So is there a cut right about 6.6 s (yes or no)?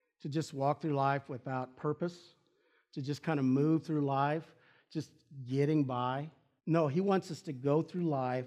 yes